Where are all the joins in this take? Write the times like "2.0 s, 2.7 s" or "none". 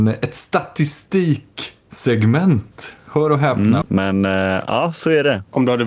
3.8 s